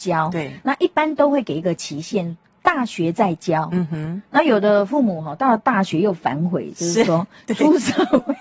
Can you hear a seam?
no; 0 cuts

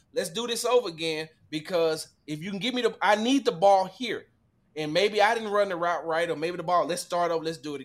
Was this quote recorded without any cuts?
yes; 0 cuts

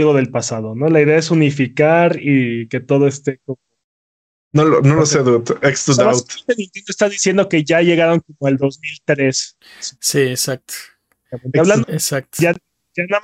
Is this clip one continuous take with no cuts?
no; 1 cut; at 11.8 s

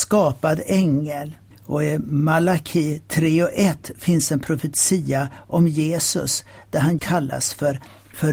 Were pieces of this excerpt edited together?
yes; 1 cut; at 7.0 s

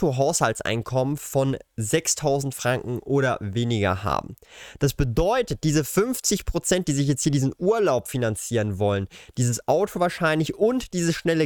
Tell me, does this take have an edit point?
no; 0 cuts

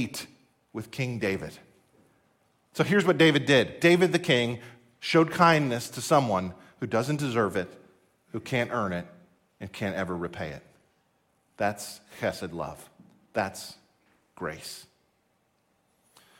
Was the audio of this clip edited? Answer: no; 0 cuts

